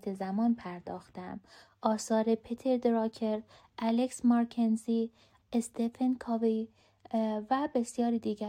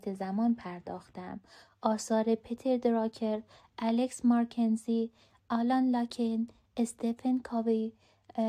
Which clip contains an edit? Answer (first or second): first